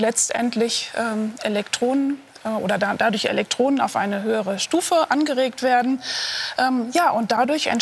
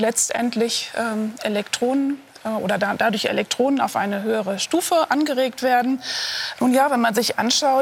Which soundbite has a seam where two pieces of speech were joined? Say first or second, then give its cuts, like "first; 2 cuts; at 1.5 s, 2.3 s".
second; 1 cut; at 6.5 s